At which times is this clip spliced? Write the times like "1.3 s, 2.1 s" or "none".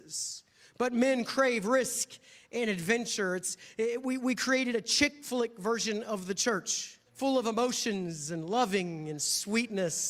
7.1 s